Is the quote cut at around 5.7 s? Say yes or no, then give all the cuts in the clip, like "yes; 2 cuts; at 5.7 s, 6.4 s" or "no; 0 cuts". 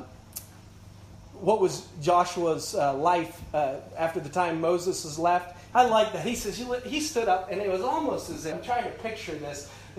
yes; 2 cuts; at 5.7 s, 8.5 s